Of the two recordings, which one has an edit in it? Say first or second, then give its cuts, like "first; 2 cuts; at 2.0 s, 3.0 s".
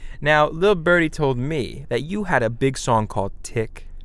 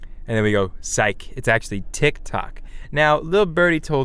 first; 1 cut; at 1.8 s